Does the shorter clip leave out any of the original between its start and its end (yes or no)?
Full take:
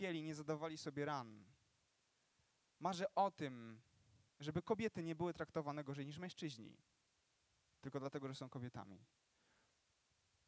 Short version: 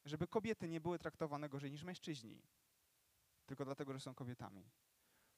no